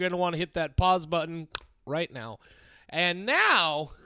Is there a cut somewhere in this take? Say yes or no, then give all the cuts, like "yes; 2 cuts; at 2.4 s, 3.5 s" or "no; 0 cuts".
no; 0 cuts